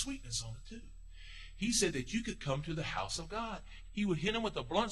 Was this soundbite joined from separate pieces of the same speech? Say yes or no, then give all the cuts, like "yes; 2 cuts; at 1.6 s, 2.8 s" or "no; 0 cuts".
yes; 1 cut; at 3.9 s